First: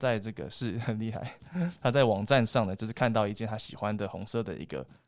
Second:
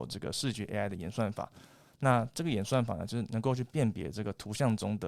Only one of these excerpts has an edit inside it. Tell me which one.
second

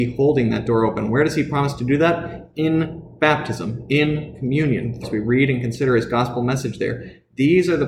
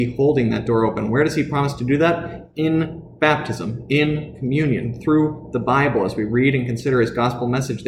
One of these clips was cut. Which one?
first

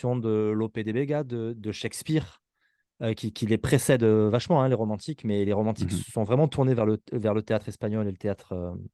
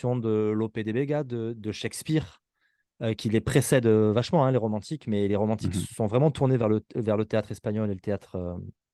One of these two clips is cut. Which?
second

